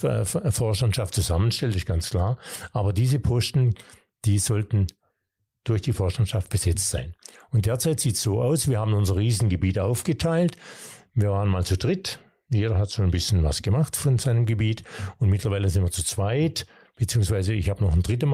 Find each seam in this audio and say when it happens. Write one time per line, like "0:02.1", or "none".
none